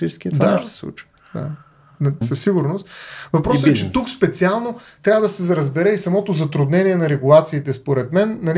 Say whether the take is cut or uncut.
cut